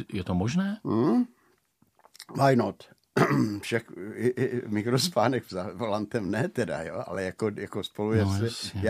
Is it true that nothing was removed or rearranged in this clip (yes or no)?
yes